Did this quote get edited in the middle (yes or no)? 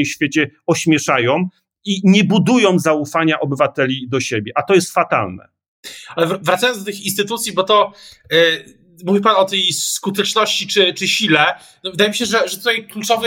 no